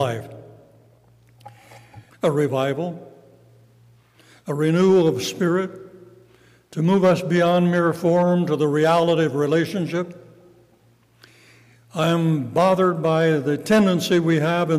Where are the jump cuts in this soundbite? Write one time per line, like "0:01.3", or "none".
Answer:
0:02.1